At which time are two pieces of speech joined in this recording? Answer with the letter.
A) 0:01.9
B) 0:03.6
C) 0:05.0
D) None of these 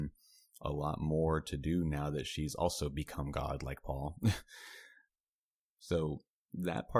D